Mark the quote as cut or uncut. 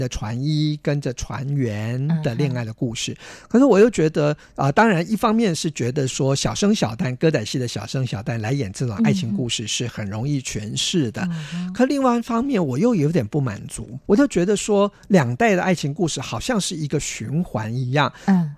cut